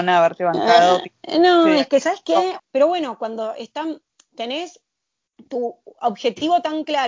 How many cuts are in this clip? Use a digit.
1